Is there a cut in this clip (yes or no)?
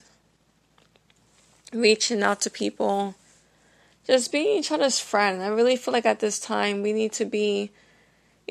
no